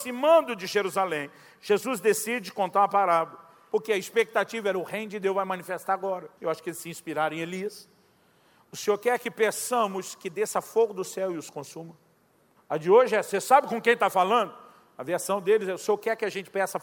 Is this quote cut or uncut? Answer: cut